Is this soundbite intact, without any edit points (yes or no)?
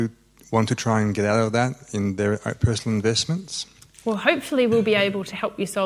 yes